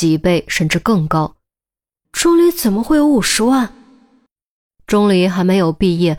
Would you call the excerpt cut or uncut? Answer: cut